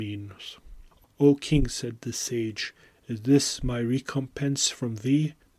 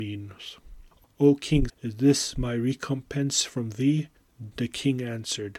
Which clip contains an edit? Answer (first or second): second